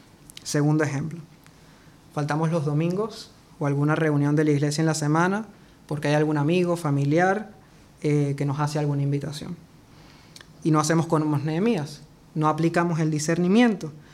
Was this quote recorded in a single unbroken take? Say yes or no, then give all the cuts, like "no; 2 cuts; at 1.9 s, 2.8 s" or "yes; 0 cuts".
yes; 0 cuts